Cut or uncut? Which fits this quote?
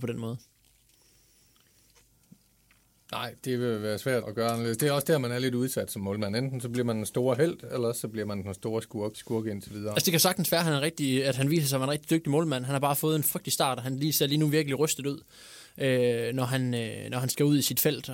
cut